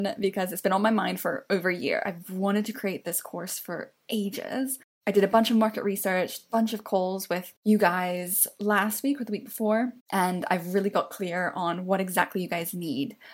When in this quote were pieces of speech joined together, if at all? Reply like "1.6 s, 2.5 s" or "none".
none